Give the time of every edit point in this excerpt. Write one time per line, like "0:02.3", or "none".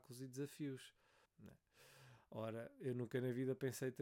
0:01.2